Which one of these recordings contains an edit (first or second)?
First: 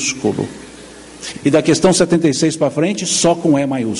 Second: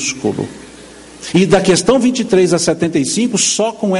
first